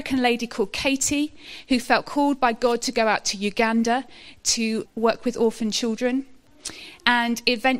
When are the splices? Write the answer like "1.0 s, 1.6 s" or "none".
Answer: 4.9 s